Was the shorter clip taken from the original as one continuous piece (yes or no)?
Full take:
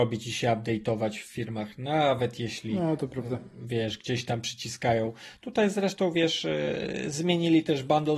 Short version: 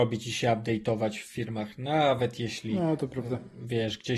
yes